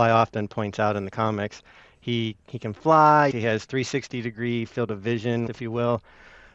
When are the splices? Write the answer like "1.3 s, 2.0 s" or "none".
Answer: 3.3 s, 5.5 s